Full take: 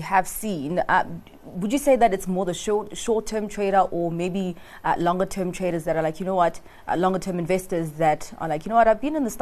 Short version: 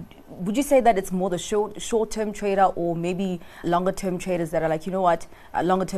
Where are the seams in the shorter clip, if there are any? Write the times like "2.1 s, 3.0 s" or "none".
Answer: 3.6 s